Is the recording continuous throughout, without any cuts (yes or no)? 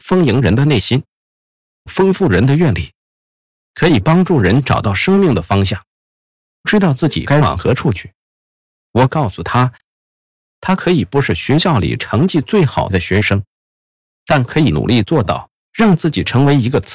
yes